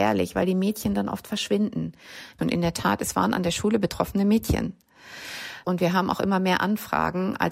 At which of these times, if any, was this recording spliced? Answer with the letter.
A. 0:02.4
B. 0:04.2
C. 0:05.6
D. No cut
A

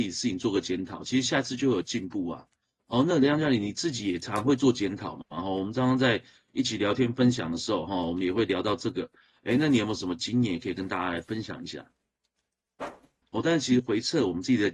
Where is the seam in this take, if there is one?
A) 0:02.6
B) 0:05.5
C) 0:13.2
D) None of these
C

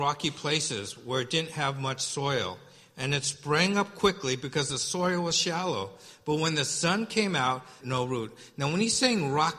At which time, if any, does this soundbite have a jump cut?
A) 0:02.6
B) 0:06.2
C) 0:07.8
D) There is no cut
C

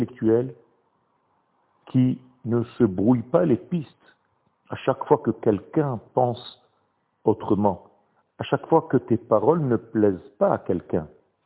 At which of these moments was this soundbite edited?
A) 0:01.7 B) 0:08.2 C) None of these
B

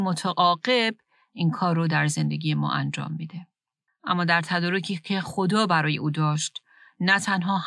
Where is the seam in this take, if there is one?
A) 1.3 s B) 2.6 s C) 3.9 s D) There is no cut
C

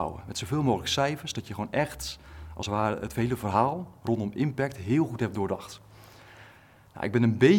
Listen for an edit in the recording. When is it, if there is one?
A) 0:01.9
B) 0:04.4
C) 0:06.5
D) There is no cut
D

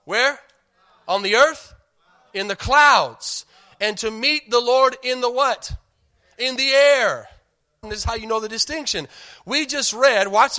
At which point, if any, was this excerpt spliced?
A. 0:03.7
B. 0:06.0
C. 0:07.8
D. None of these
C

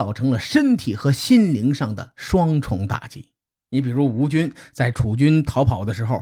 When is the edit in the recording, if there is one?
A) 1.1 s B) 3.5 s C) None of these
B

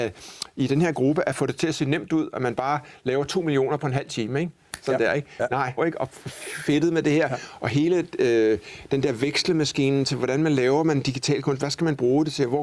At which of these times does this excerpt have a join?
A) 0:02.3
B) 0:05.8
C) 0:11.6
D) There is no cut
B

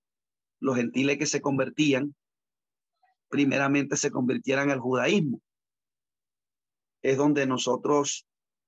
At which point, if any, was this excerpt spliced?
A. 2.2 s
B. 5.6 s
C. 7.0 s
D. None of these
C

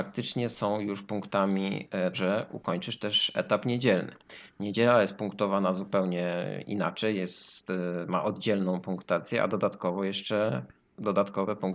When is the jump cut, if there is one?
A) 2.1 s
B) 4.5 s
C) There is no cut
A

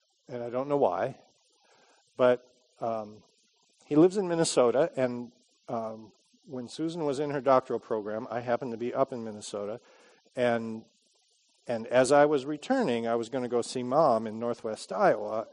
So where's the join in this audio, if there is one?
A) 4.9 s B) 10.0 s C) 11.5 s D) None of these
D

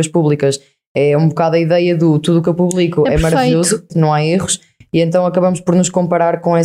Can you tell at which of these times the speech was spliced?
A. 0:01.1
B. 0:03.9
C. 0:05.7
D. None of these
B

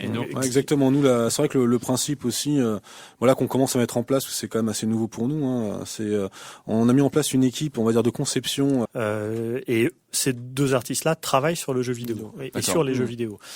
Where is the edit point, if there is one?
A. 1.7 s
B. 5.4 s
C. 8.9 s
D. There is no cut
C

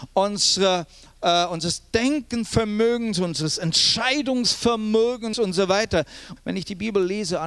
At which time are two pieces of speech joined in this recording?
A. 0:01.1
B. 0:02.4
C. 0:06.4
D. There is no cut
C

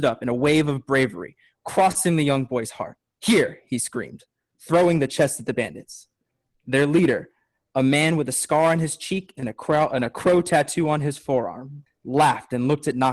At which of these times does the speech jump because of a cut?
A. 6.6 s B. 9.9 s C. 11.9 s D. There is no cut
C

